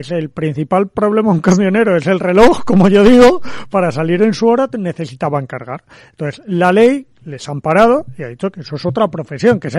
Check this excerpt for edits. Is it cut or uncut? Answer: uncut